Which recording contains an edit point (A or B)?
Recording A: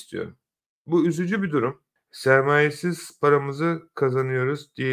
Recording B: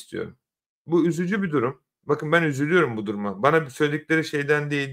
A